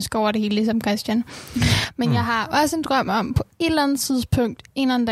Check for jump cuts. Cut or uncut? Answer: uncut